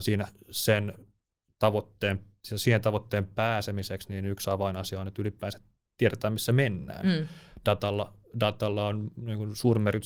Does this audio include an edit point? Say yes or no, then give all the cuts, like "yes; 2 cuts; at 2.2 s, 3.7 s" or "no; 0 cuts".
no; 0 cuts